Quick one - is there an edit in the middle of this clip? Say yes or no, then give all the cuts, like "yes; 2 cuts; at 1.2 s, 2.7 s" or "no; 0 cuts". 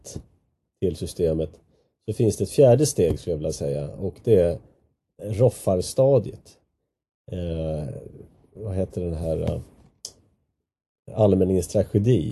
no; 0 cuts